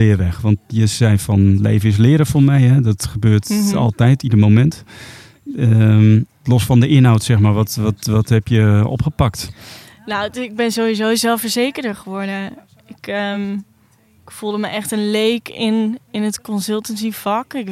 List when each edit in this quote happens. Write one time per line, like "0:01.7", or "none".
none